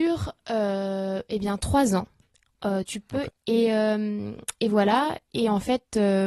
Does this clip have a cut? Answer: yes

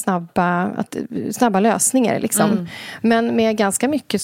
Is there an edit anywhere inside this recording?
no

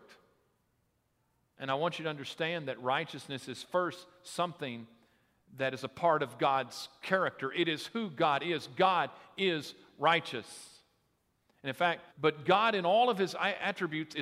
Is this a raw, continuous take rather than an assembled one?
no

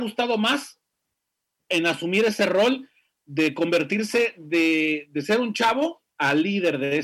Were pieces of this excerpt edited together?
yes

